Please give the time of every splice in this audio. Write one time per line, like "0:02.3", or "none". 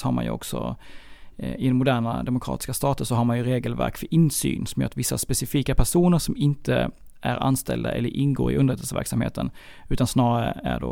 none